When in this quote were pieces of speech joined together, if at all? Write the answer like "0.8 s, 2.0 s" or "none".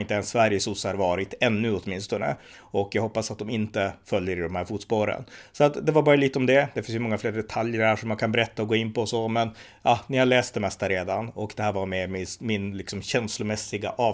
none